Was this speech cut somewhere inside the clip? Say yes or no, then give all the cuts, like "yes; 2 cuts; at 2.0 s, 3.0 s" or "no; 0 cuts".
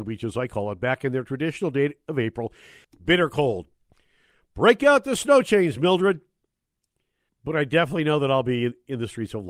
yes; 2 cuts; at 2.8 s, 7.3 s